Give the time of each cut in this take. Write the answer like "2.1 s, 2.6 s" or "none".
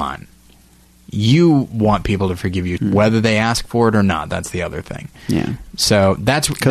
2.8 s